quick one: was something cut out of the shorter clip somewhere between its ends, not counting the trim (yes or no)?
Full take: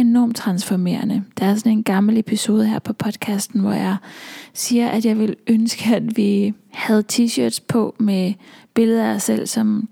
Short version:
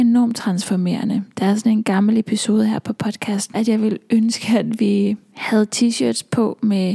yes